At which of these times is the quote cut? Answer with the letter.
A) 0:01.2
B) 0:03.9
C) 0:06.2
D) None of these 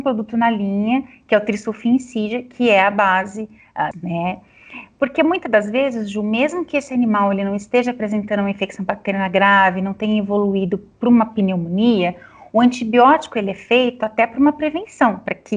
B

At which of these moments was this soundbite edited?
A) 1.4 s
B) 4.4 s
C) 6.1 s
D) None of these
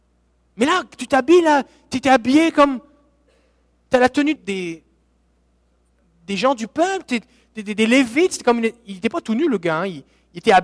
B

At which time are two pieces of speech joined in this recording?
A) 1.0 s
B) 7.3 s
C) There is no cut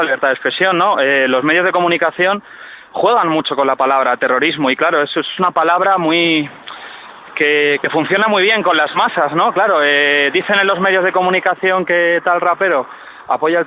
C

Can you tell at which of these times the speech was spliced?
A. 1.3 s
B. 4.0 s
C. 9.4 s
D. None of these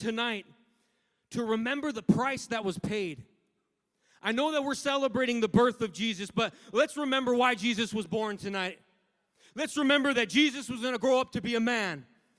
D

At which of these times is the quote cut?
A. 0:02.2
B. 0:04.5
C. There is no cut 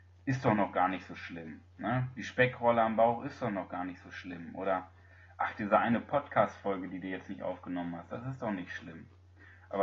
C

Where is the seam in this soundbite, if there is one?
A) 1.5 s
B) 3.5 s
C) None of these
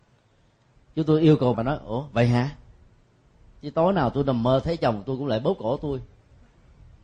A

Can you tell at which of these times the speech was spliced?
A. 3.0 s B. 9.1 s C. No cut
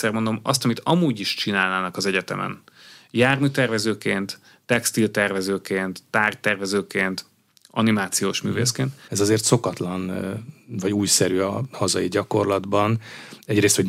B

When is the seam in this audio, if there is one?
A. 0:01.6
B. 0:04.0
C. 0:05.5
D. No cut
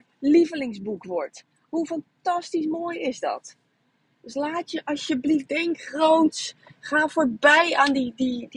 C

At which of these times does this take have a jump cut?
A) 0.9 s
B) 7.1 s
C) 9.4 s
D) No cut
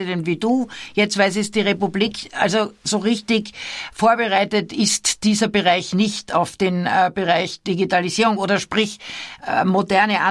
D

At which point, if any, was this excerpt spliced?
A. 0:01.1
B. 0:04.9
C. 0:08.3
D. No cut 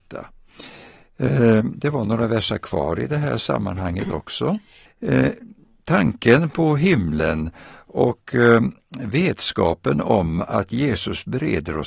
B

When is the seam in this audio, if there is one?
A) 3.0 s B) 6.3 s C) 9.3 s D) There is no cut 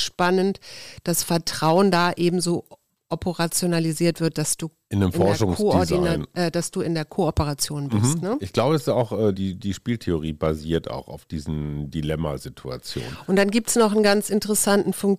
C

